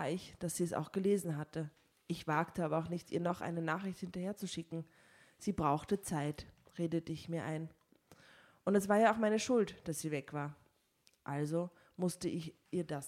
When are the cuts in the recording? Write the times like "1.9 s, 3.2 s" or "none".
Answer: 1.9 s